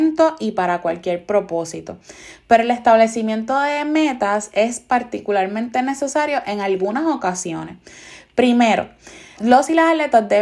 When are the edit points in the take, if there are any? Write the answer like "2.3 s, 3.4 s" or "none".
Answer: 9.4 s